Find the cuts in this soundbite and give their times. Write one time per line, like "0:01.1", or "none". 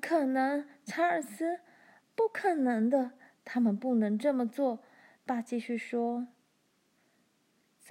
0:05.2